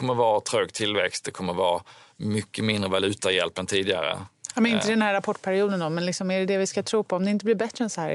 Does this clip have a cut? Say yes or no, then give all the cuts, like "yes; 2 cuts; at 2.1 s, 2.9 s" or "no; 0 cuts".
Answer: no; 0 cuts